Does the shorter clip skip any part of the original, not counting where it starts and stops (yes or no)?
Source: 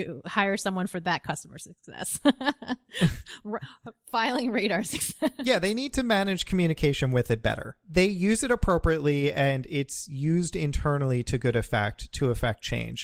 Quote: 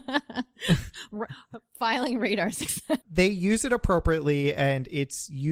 yes